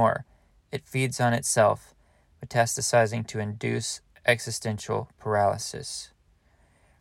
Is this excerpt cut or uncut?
uncut